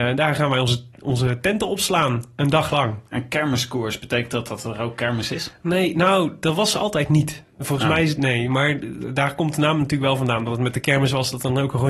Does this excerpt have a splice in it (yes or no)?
no